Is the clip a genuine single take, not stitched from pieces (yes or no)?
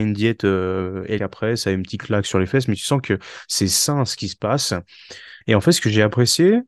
no